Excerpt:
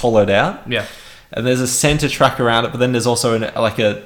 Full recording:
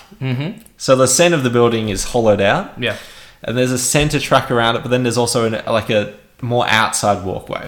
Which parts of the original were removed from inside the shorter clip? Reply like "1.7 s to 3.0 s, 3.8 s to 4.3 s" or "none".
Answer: none